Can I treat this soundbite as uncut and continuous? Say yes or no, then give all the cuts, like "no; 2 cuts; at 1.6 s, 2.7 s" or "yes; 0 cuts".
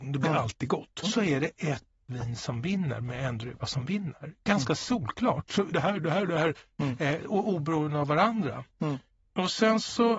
no; 2 cuts; at 1.0 s, 5.7 s